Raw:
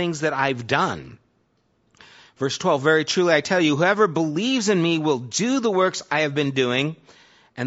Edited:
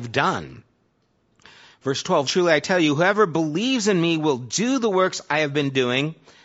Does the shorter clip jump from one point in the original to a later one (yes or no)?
yes